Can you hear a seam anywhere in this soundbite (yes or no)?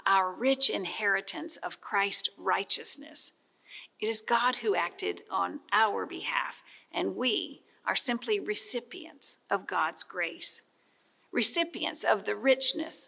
yes